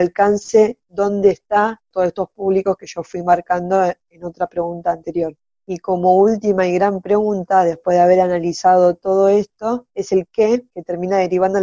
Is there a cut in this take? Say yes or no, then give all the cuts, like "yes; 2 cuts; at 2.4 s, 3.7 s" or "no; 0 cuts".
no; 0 cuts